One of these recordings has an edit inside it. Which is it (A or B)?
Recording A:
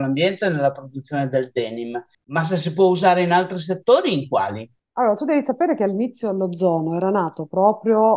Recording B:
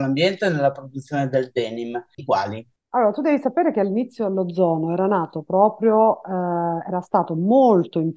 B